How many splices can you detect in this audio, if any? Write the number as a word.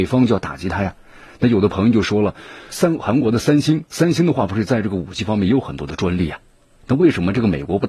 one